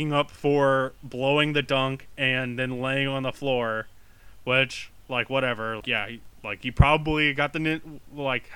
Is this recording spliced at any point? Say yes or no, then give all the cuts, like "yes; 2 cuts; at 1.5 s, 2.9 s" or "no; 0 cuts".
yes; 1 cut; at 5.8 s